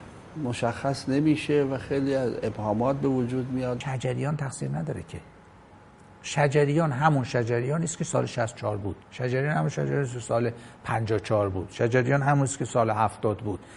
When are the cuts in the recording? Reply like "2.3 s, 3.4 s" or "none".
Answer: 9.0 s